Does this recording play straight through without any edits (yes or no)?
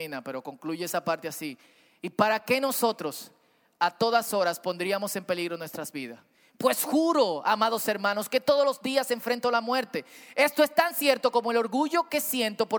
yes